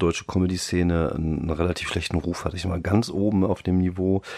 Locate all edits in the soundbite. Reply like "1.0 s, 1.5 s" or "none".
none